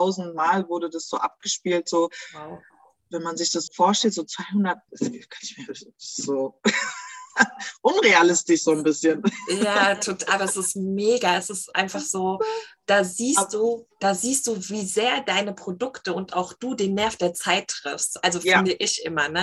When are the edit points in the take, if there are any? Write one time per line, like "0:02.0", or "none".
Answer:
0:03.7
0:04.9